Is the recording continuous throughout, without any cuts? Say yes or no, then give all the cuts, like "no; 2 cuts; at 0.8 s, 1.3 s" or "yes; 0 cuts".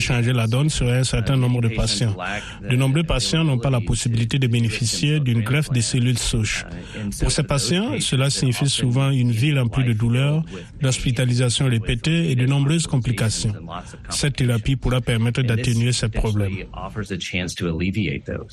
yes; 0 cuts